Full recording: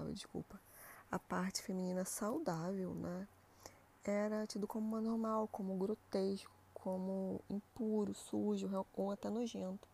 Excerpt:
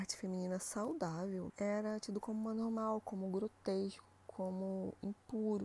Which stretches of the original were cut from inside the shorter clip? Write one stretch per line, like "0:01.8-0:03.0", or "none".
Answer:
0:02.9-0:04.0